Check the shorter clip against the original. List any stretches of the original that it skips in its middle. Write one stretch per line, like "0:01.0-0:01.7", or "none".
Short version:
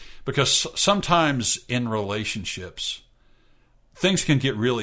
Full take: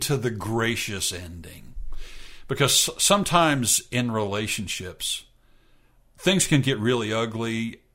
none